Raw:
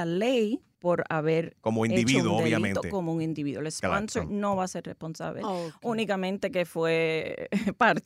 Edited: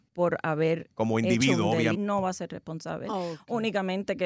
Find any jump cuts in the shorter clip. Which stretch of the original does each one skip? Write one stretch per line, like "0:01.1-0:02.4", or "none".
0:02.6-0:04.3

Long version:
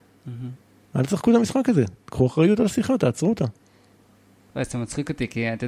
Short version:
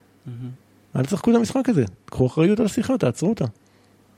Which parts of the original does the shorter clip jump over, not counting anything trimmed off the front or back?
none

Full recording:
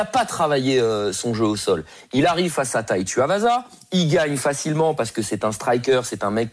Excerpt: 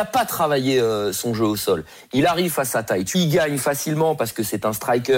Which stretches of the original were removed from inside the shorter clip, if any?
0:03.1-0:03.9

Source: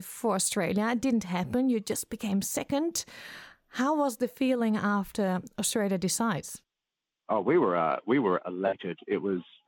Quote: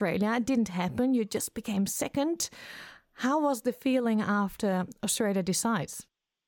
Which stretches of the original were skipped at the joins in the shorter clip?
none

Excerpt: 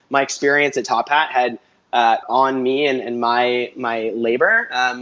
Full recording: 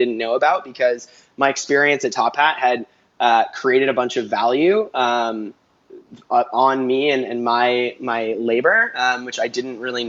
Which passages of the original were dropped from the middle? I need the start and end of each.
0:03.5-0:06.5

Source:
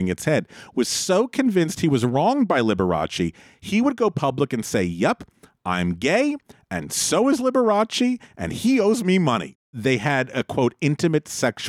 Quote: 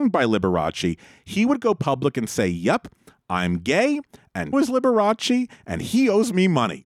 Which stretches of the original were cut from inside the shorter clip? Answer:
0:06.9-0:07.2

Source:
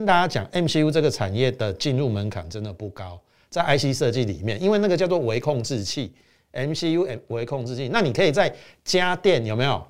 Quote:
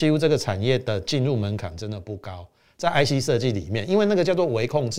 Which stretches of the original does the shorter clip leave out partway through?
none

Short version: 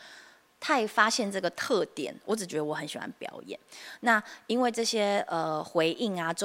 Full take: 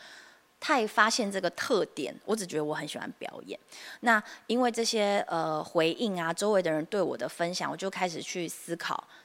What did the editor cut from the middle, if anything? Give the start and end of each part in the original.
none

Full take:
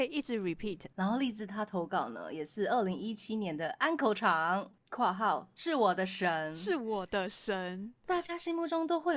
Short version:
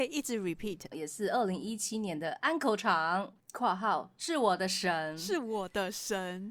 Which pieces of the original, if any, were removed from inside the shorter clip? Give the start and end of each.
0:00.9-0:02.3

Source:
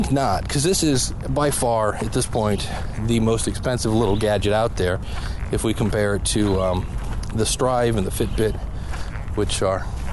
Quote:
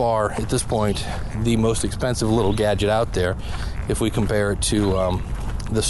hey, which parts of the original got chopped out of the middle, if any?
none

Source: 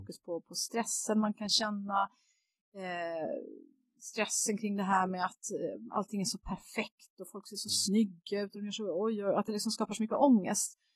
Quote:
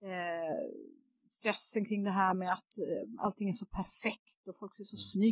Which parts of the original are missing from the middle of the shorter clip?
none

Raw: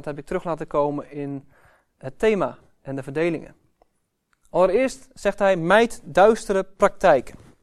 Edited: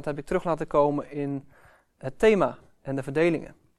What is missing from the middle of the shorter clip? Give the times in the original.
none

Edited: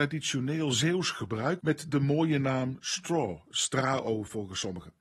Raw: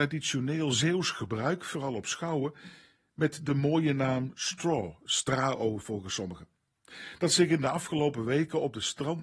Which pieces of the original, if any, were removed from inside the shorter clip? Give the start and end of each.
0:01.6-0:03.1

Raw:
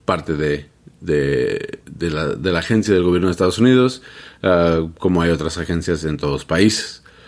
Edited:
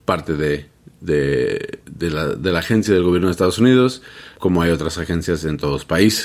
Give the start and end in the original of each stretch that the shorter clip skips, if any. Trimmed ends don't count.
0:04.4-0:05.0

